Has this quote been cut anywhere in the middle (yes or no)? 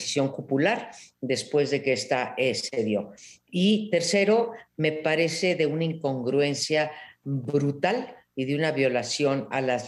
no